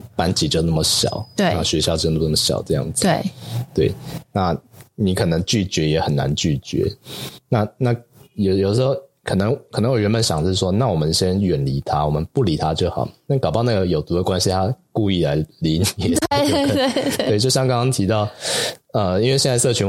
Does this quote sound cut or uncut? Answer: uncut